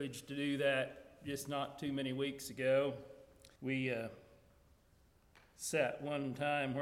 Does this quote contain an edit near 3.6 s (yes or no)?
yes